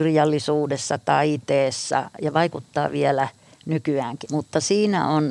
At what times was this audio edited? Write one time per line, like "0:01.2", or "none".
0:04.2